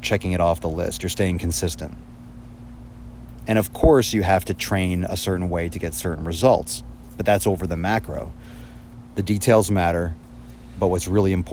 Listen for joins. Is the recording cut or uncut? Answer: uncut